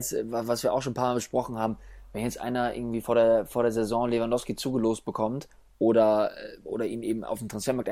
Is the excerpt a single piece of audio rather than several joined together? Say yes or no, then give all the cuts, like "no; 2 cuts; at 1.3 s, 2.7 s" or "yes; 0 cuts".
yes; 0 cuts